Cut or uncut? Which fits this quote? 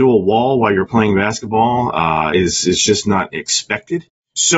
uncut